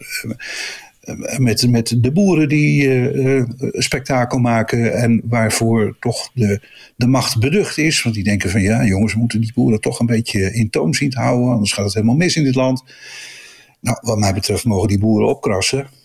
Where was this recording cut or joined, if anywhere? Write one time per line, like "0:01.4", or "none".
none